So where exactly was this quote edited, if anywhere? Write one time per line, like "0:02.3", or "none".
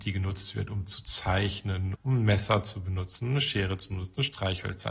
0:01.9